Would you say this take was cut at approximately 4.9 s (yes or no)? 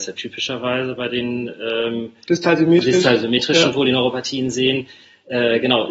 no